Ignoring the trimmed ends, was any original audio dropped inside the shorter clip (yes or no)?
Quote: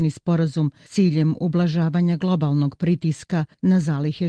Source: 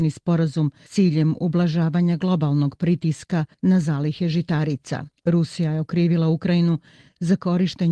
no